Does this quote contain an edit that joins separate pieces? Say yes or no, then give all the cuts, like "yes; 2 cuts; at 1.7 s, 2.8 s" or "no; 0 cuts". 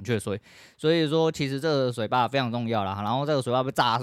no; 0 cuts